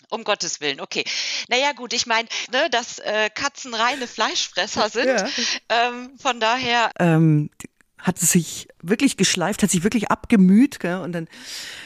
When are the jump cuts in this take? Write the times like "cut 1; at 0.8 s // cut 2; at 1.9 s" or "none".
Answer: cut 1; at 2.5 s // cut 2; at 6.9 s